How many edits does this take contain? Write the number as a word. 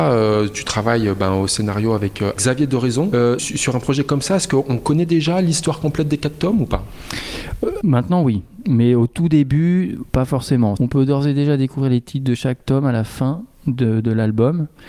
three